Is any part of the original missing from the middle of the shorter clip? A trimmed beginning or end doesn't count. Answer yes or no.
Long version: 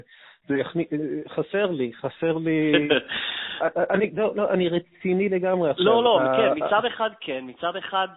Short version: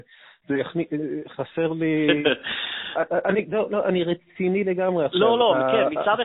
yes